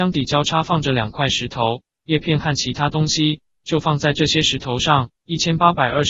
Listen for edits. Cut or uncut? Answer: cut